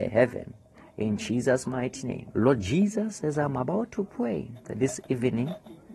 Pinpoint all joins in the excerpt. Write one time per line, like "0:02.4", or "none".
0:02.3
0:04.6